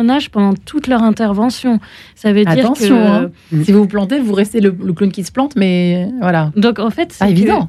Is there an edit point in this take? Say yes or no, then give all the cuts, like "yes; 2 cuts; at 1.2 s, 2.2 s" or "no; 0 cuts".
no; 0 cuts